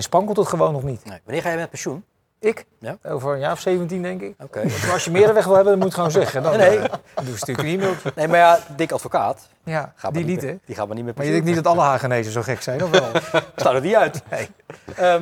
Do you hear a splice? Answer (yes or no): no